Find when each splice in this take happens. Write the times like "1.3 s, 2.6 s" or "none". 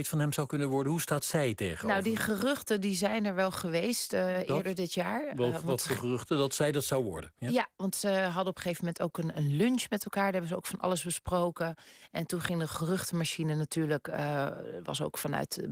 none

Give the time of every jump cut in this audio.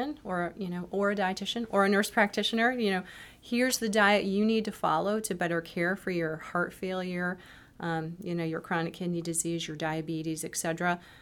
none

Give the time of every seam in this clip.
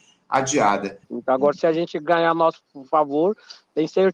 1.0 s

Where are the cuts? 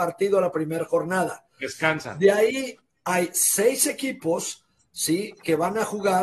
none

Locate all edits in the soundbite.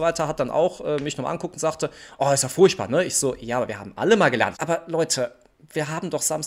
4.5 s

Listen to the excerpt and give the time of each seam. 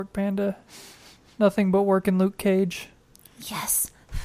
none

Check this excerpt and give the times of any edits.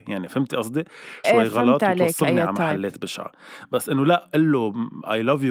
1.2 s

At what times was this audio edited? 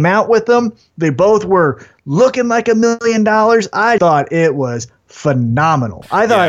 4.0 s

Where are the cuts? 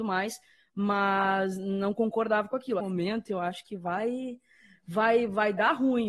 2.8 s

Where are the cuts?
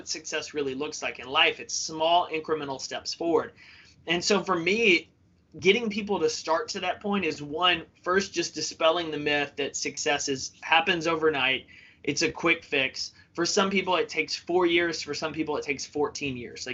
none

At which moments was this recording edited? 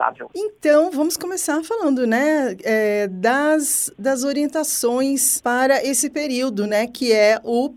none

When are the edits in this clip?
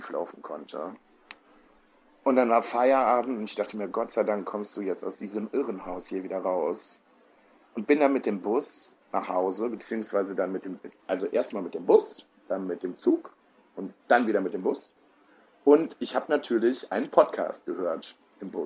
none

